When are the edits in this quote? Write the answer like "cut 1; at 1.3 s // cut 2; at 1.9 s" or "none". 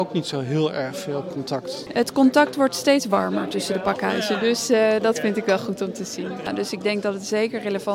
none